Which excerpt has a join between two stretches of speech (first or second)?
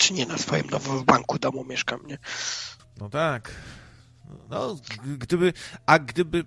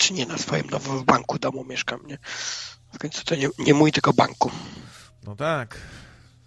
first